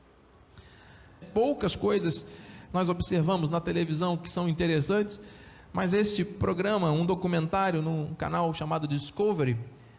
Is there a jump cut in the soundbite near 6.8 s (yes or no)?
no